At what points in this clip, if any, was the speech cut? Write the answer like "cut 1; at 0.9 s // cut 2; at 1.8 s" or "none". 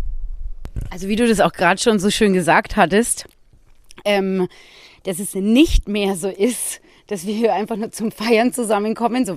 none